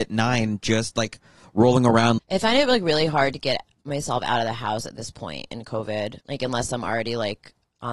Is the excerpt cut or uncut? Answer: cut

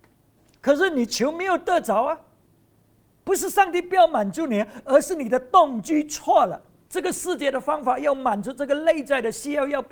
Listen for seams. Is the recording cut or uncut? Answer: cut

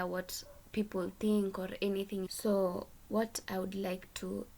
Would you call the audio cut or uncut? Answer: cut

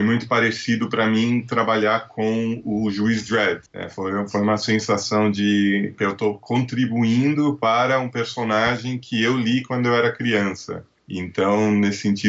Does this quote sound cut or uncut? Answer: cut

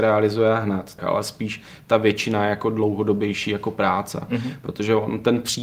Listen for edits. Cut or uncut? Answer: cut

